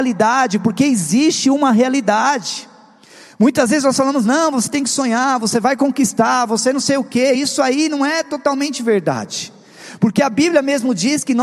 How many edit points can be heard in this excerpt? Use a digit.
0